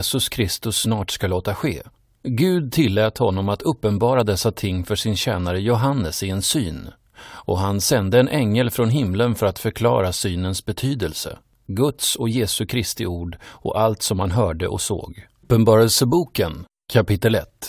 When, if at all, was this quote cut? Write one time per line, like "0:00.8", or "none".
0:11.5
0:15.4

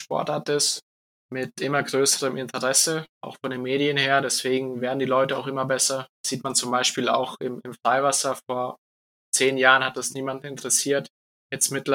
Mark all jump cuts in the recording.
none

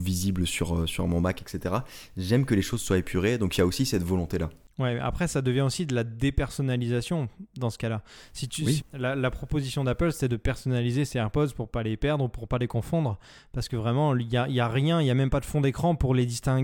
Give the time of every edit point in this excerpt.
0:08.8

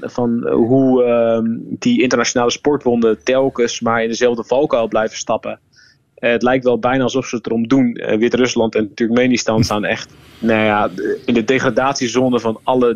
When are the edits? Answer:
none

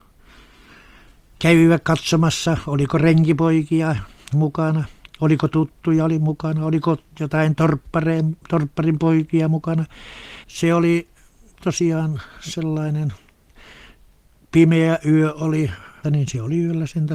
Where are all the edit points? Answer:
0:10.4
0:16.0

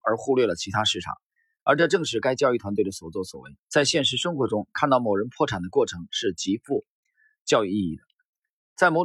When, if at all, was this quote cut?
0:03.6

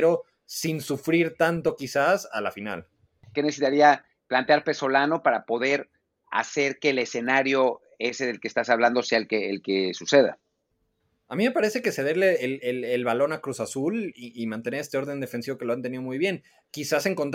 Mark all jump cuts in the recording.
0:03.3

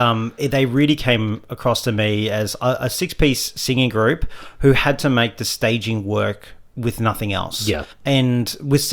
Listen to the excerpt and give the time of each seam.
0:07.9

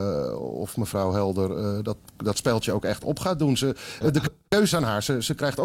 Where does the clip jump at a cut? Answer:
none

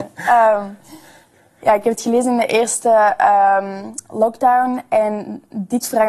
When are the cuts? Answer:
none

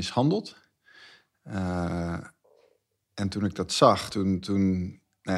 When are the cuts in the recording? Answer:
none

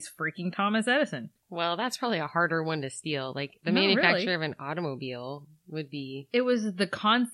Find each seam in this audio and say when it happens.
0:01.4

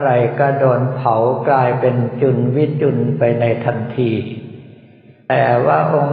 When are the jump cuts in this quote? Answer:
none

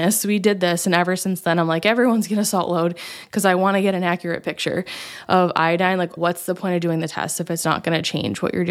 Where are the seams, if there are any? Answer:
0:06.2

